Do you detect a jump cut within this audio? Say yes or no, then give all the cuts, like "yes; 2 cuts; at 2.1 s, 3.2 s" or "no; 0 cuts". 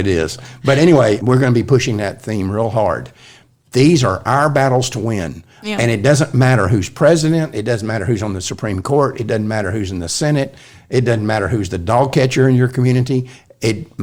no; 0 cuts